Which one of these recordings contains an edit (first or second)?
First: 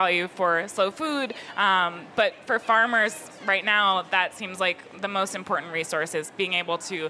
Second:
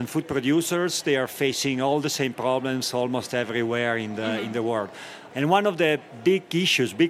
second